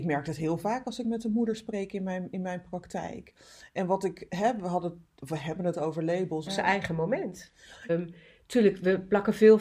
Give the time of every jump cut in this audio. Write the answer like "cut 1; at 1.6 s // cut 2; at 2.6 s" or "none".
cut 1; at 6.5 s // cut 2; at 7.9 s